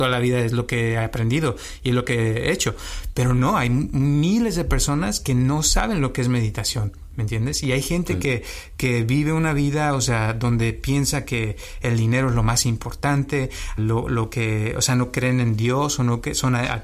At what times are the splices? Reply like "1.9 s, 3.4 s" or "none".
13.8 s